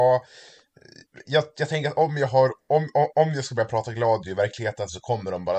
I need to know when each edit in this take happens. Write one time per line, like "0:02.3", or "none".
none